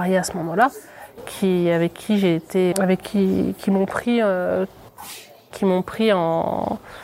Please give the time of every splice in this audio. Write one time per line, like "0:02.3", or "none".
0:02.7